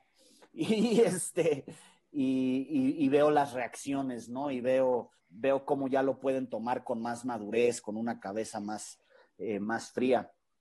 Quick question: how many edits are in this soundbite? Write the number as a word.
one